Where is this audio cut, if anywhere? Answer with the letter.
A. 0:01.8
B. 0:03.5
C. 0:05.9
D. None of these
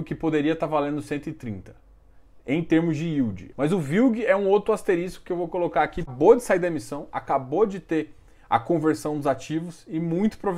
B